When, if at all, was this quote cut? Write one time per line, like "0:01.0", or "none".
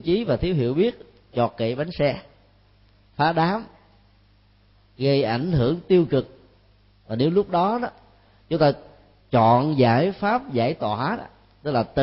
none

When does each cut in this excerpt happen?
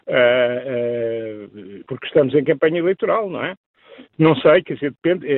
0:01.8
0:04.1

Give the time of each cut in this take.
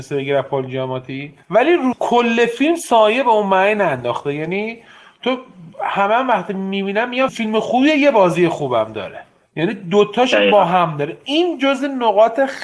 0:07.3

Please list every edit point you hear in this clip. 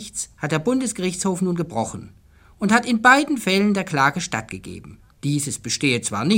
0:05.2

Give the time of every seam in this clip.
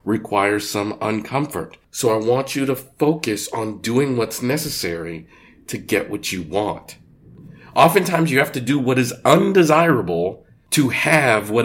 none

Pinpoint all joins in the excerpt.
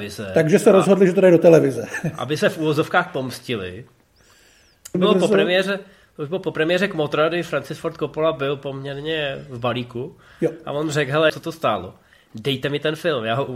0:04.9
0:11.3

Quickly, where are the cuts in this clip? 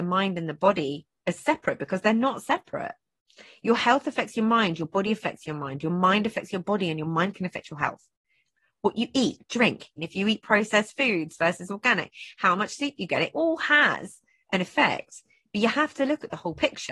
0:10.0

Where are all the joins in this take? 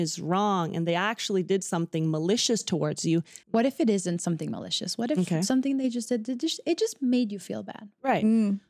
0:03.4

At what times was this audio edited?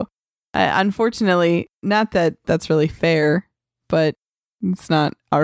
none

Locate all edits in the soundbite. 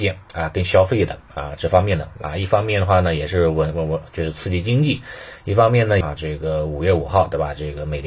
0:06.0

